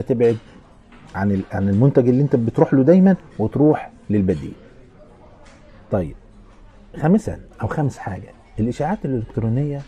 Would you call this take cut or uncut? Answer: cut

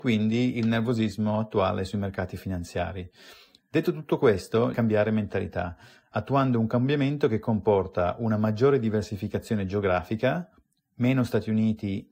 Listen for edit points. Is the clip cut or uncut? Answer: cut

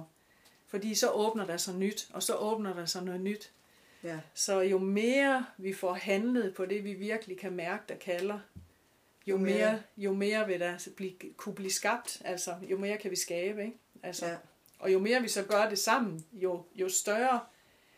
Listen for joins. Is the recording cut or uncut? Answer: uncut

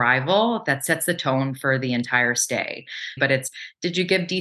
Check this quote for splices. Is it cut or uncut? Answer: cut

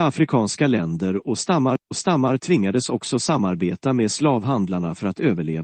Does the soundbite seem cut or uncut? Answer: uncut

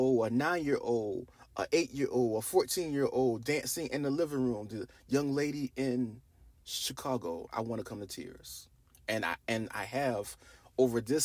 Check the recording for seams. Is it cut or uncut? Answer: uncut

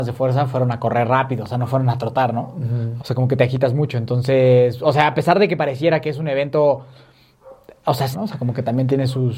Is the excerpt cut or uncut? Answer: cut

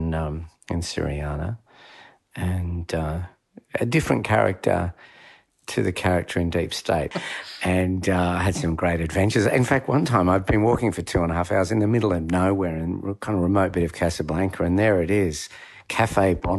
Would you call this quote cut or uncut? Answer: cut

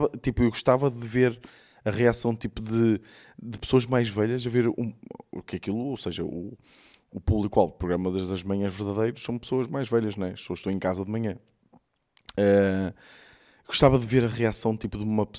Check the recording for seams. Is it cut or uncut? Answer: uncut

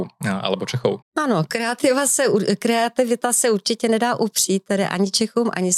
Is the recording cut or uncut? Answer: cut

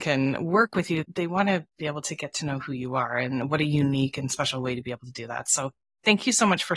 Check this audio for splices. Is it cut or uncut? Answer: uncut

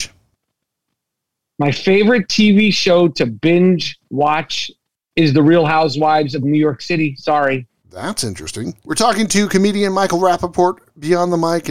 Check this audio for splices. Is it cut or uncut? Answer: cut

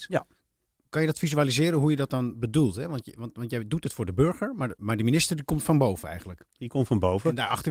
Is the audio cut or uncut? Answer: cut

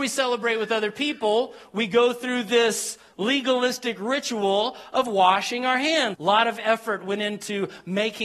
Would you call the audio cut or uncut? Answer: cut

